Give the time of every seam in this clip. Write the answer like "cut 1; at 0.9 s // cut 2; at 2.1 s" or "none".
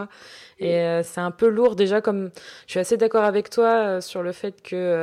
none

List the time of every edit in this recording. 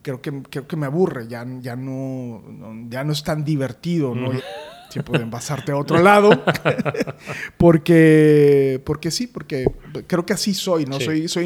cut 1; at 4.4 s

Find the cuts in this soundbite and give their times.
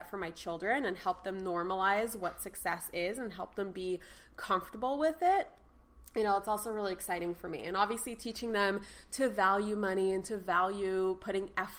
none

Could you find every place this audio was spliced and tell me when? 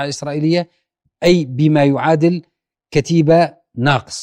none

